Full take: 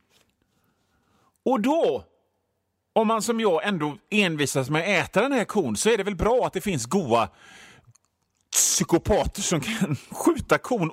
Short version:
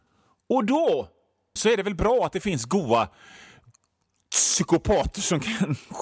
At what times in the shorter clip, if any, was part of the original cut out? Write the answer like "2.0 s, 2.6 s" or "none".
1.6 s